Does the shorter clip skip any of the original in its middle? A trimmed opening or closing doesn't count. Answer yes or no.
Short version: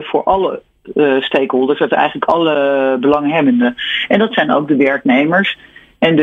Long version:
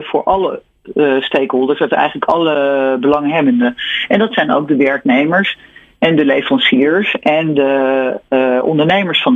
no